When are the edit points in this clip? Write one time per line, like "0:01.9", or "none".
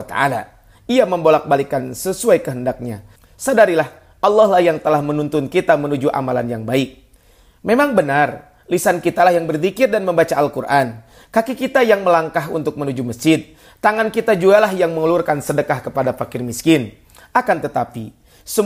0:03.2